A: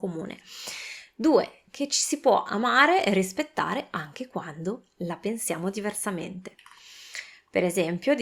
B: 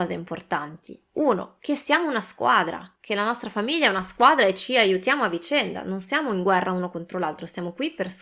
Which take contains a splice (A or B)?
B